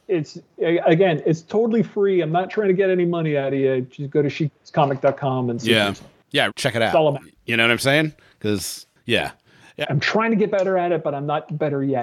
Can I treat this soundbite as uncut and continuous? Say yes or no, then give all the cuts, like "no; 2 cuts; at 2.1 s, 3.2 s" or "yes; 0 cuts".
no; 2 cuts; at 6.5 s, 9.8 s